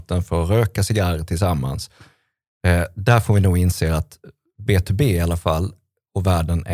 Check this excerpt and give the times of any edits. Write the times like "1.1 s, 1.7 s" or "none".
none